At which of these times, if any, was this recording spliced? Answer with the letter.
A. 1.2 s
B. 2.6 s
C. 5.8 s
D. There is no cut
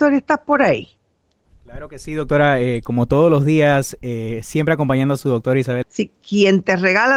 C